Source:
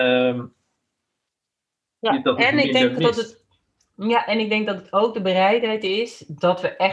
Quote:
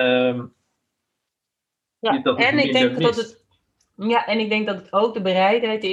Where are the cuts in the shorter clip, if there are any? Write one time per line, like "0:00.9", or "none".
none